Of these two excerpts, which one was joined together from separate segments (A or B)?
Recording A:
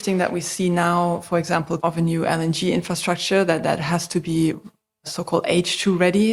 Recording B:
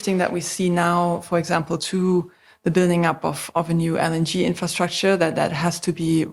A